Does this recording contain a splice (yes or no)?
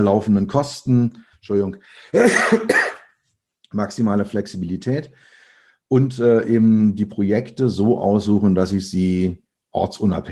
yes